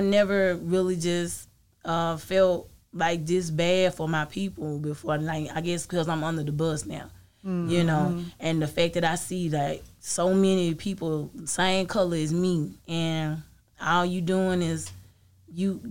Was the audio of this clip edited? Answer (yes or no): no